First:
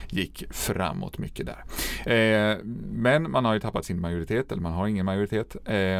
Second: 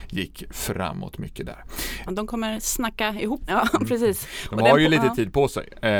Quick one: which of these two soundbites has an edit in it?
second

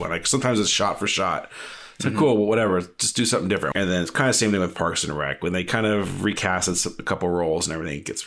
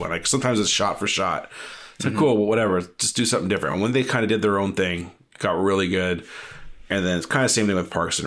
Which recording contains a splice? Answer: first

